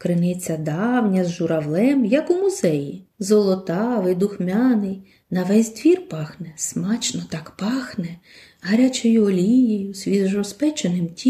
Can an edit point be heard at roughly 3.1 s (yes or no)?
yes